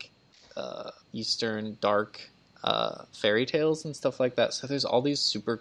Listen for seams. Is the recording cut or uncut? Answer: cut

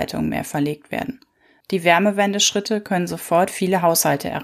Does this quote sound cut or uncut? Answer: cut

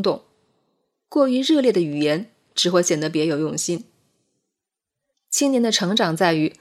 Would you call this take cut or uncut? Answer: cut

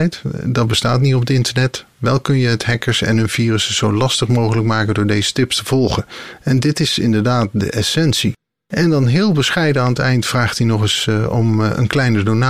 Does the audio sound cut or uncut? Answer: uncut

